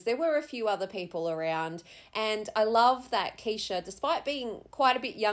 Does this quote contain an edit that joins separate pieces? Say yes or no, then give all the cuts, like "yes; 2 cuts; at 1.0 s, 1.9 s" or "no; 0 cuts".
no; 0 cuts